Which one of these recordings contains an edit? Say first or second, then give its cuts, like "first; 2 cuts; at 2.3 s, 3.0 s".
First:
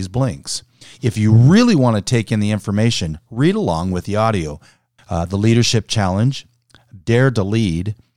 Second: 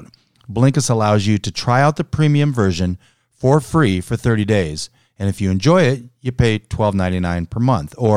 first; 2 cuts; at 5.0 s, 7.0 s